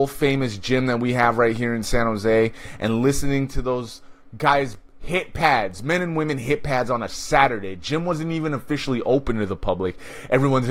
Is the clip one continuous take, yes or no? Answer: yes